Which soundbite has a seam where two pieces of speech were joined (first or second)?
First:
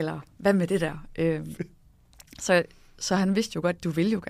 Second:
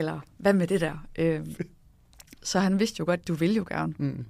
second